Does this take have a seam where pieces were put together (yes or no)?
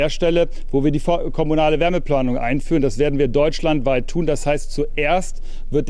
no